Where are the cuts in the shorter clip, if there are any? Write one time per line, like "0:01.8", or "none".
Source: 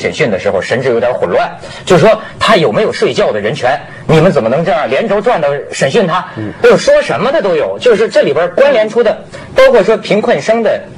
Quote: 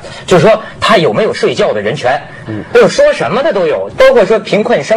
0:02.5
0:03.9